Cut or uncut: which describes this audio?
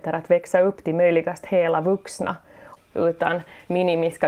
cut